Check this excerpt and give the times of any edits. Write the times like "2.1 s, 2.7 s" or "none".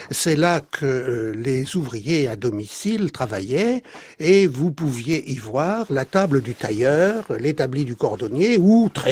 none